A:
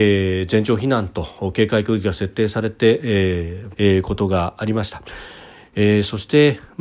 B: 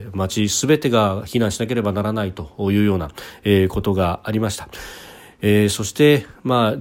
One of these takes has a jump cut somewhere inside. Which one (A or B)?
A